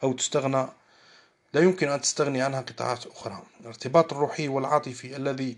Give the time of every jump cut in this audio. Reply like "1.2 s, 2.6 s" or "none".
3.5 s